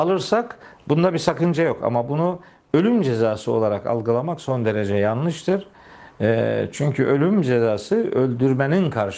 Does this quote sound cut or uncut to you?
uncut